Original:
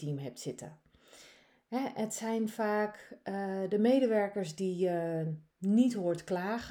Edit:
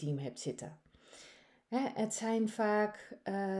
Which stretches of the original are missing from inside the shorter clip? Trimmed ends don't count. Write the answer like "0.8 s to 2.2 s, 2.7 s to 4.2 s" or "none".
none